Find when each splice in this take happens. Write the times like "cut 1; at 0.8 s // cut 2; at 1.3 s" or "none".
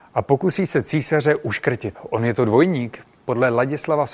cut 1; at 1.9 s

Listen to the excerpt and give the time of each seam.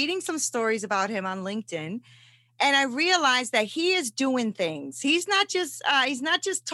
none

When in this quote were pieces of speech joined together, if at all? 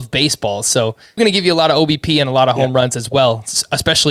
cut 1; at 1.2 s

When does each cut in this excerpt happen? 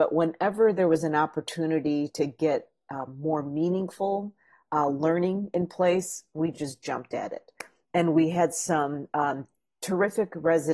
none

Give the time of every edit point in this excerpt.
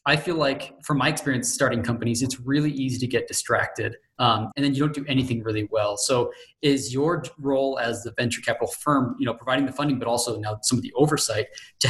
cut 1; at 4.5 s

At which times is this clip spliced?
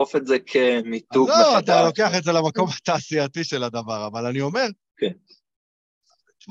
none

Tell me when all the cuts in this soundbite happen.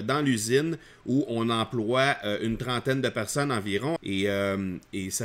cut 1; at 4.0 s

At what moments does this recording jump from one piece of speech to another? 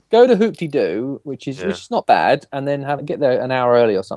cut 1; at 3.0 s

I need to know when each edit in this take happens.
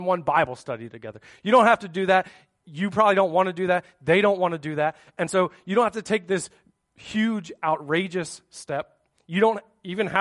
none

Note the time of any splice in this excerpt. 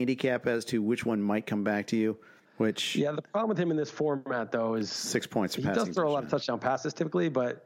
cut 1; at 2.5 s

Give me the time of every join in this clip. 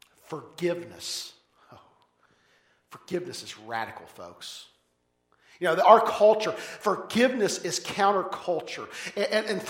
none

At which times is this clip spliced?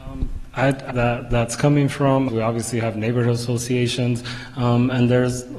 cut 1; at 0.9 s // cut 2; at 2.3 s

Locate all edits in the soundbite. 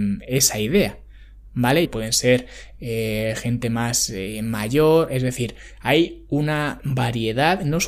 cut 1; at 1.8 s

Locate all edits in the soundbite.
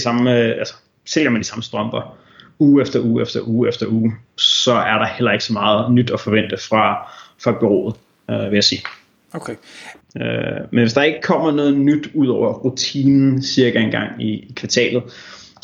cut 1; at 10.0 s

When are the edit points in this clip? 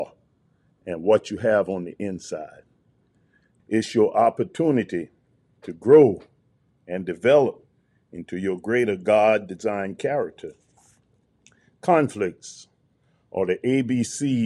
cut 1; at 3.6 s

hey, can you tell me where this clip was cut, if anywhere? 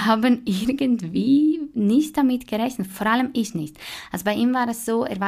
none

